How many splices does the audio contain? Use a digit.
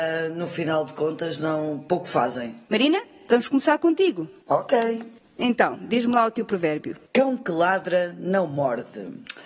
1